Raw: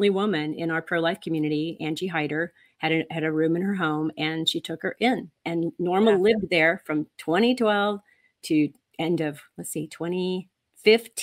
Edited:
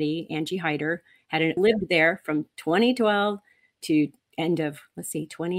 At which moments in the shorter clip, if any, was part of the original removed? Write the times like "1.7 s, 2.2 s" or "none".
1.6 s

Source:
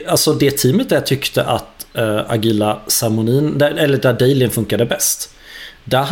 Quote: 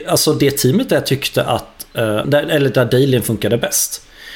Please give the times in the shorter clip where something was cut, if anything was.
2.2 s

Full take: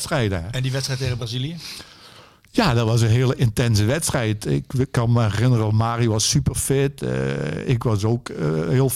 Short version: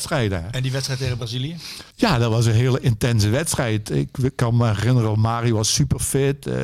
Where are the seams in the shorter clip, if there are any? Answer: 1.9 s

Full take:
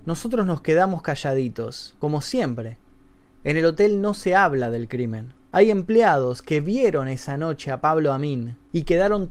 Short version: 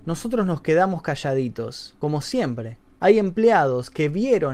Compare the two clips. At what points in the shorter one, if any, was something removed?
2.9 s

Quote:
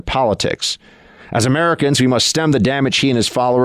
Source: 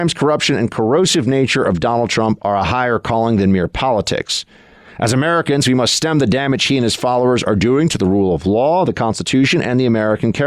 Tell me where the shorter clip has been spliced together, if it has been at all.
none

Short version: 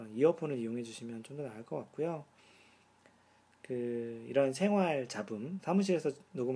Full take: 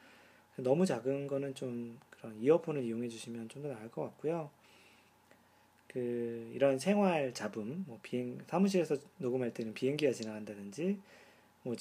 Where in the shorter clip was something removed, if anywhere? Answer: 5.6 s

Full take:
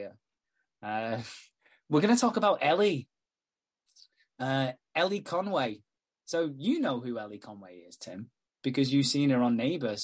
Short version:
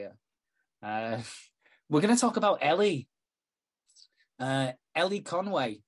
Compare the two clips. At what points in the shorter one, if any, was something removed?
none

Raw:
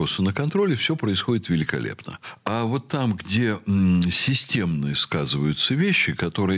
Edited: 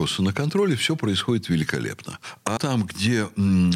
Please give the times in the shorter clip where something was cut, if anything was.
2.6 s

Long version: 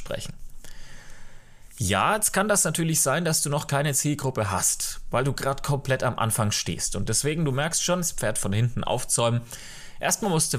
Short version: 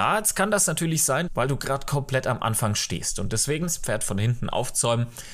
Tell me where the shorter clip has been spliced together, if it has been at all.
1.3 s, 3.6 s

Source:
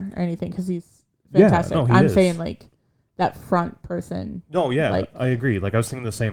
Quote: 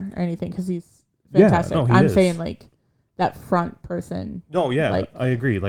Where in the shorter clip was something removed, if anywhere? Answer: none

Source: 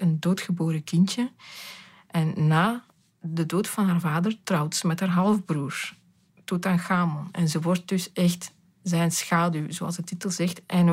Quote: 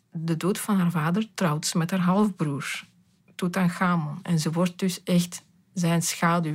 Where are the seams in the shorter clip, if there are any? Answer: none

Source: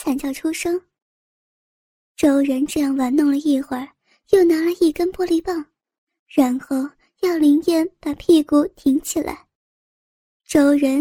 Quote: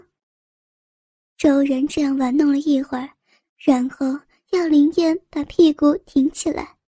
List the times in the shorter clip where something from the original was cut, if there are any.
3.4 s

